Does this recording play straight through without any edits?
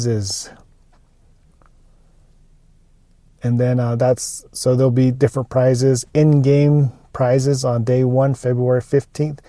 yes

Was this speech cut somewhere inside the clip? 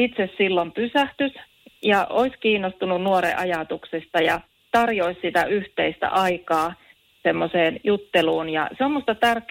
no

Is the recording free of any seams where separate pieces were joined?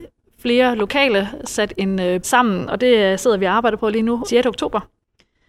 no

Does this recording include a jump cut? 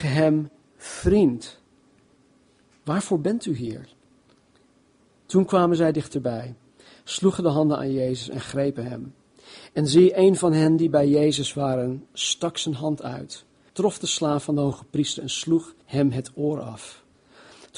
yes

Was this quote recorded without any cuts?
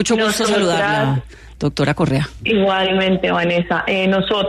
yes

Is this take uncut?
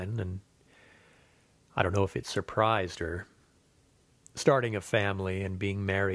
yes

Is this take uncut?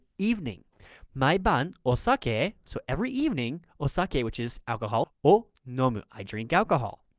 no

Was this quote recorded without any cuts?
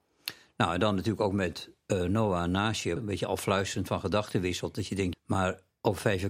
no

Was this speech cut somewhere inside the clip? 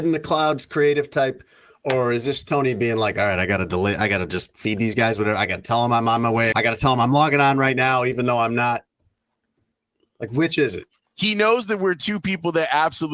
yes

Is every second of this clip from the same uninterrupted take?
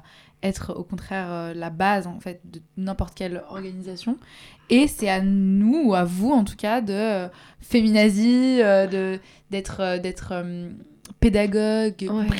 no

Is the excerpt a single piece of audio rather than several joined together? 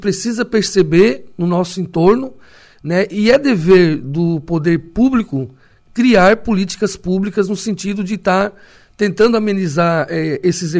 yes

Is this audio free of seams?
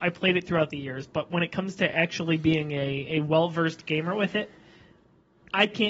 yes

